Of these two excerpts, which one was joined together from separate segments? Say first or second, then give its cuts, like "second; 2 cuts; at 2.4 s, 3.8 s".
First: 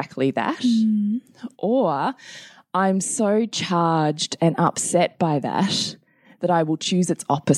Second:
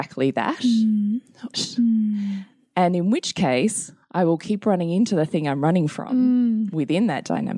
second; 1 cut; at 1.5 s